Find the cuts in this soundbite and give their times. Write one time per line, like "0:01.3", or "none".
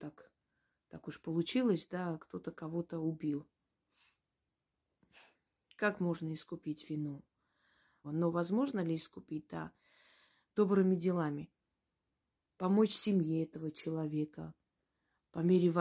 0:08.0